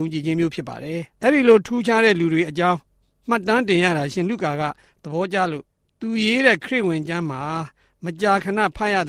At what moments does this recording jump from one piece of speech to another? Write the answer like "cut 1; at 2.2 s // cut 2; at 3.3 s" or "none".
cut 1; at 1.1 s